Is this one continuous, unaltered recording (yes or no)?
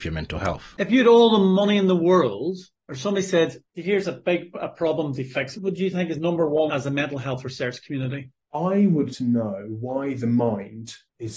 no